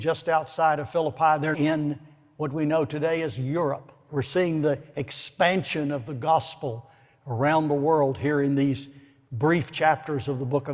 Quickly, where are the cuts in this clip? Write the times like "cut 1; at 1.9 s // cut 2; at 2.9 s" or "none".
cut 1; at 1.5 s // cut 2; at 4.1 s